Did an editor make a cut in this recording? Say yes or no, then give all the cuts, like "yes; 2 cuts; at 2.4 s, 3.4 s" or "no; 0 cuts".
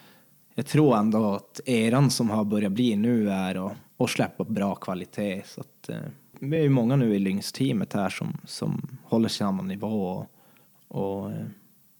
no; 0 cuts